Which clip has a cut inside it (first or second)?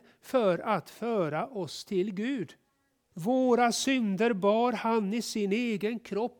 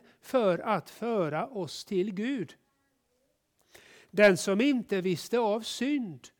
first